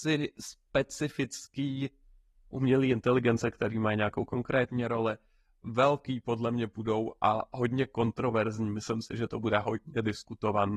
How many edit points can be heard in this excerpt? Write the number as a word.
zero